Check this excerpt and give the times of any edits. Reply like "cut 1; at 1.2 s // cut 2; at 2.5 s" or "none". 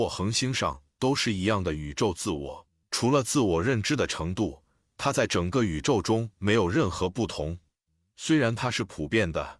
cut 1; at 2.8 s